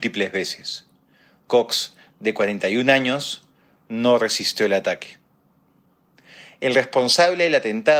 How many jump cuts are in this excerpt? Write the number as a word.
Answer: zero